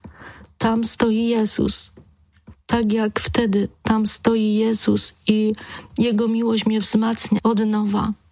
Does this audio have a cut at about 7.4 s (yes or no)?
yes